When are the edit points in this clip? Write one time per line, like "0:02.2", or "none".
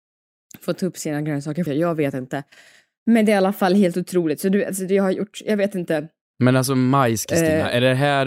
0:01.7
0:06.3